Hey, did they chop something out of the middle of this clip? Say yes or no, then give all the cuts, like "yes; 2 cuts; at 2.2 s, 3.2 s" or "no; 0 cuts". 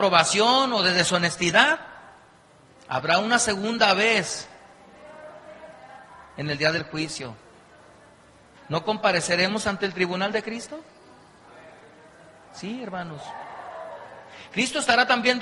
yes; 1 cut; at 8.5 s